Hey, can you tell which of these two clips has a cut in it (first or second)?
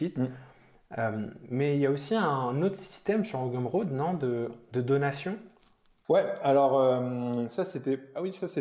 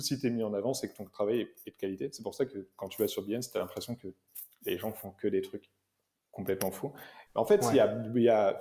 second